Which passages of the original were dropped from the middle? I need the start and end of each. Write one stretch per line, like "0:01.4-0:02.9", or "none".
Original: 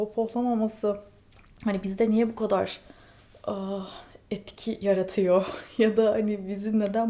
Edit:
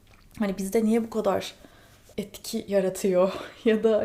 0:03.4-0:04.3